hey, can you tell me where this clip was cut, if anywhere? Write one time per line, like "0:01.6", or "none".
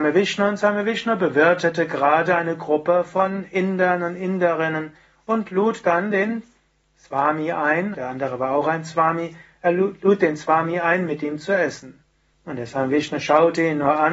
0:07.9
0:12.3